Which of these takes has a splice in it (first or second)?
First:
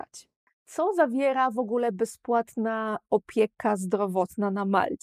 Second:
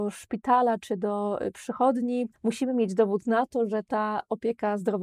second